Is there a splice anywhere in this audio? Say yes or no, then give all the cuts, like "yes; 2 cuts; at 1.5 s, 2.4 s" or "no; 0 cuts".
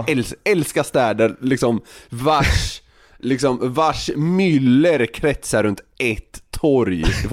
no; 0 cuts